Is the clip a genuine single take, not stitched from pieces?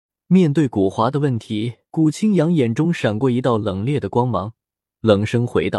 no; 1 cut; at 1.9 s

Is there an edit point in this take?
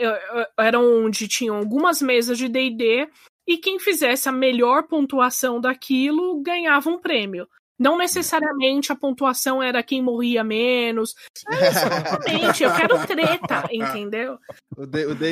yes; 1 cut; at 11.4 s

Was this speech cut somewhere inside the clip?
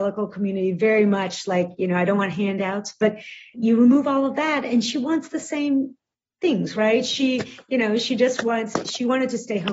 no; 0 cuts

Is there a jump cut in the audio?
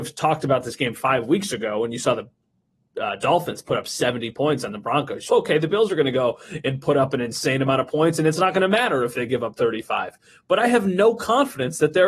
yes; 1 cut; at 5.3 s

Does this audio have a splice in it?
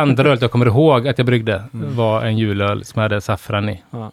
no; 0 cuts

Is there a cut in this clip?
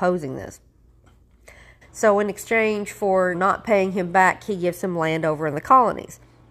yes; 2 cuts; at 1.8 s, 3.3 s

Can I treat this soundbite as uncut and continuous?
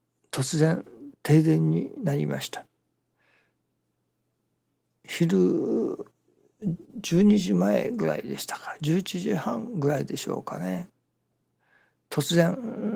yes; 0 cuts

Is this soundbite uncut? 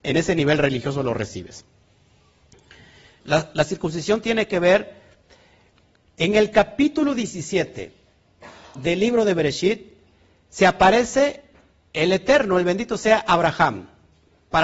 no; 1 cut; at 3.2 s

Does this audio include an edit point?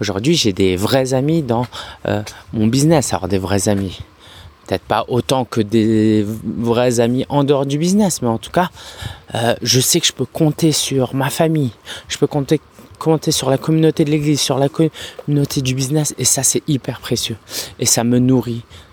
no; 0 cuts

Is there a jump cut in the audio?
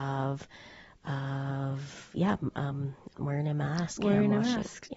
yes; 1 cut; at 3.1 s

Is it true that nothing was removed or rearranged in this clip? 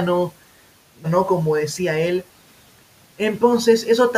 no; 1 cut; at 1.0 s

